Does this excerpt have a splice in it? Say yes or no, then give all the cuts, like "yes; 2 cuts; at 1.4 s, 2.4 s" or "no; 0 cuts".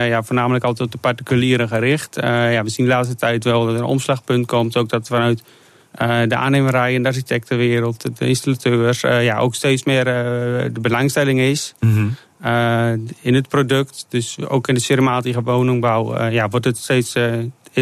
no; 0 cuts